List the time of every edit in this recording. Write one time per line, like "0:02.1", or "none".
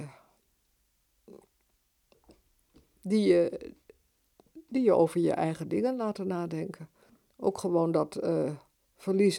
0:02.8